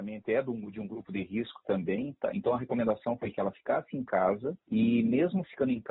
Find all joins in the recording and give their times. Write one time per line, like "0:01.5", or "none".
0:04.6